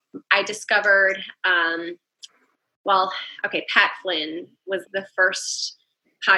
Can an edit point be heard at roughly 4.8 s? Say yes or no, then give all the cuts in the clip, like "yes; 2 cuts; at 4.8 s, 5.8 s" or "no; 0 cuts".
yes; 1 cut; at 4.8 s